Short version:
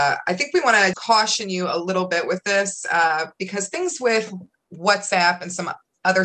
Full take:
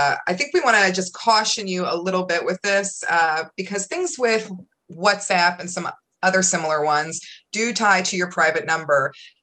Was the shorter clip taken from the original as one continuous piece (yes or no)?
no